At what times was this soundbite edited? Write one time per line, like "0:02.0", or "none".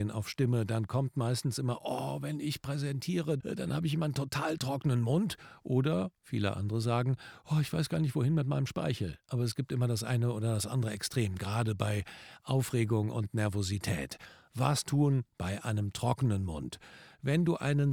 0:03.4